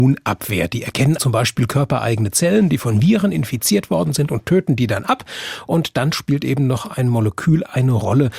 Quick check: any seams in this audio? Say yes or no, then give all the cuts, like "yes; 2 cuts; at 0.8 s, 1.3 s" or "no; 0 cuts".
yes; 1 cut; at 1.2 s